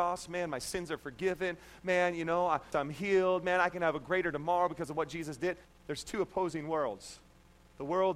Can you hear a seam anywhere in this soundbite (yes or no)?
yes